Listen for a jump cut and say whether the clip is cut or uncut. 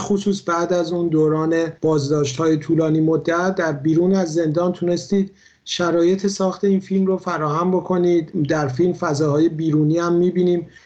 cut